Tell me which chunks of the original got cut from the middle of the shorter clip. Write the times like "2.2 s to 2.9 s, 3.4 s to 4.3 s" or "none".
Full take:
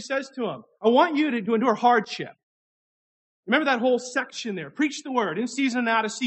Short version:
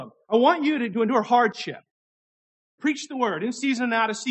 3.3 s to 4.7 s